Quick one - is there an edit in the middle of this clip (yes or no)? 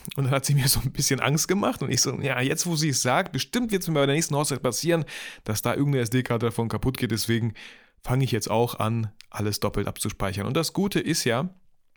no